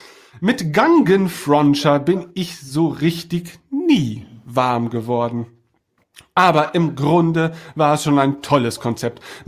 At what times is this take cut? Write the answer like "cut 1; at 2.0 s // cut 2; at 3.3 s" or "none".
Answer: none